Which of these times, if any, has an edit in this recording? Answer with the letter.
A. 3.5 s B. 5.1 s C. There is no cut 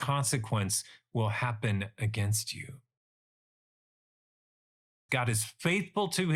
B